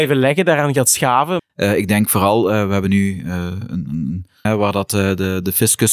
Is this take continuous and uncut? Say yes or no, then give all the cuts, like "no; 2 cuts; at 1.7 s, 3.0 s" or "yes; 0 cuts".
no; 2 cuts; at 1.4 s, 4.5 s